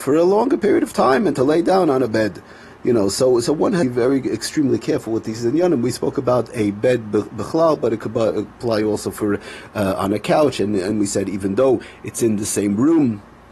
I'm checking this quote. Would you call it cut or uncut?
uncut